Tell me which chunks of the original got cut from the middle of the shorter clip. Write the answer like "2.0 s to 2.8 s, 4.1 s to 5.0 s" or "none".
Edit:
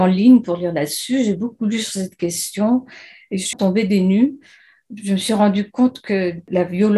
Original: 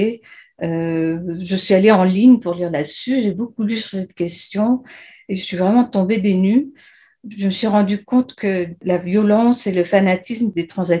5.5 s to 5.9 s